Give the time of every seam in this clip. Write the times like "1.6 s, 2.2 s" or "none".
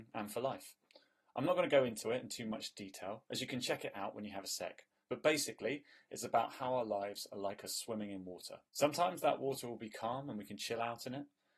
8.7 s